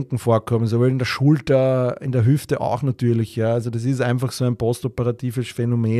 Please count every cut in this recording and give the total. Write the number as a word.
zero